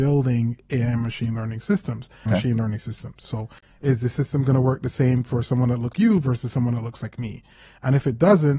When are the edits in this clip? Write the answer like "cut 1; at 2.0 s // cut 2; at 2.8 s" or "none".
cut 1; at 2.3 s // cut 2; at 5.9 s